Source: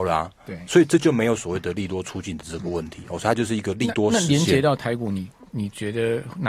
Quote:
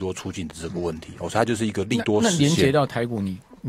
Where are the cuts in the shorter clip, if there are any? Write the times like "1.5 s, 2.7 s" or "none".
none